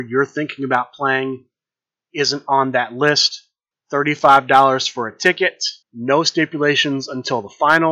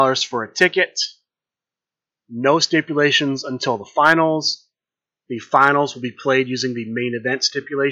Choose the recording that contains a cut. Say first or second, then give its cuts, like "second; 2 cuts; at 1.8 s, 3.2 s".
first; 2 cuts; at 3.7 s, 5.8 s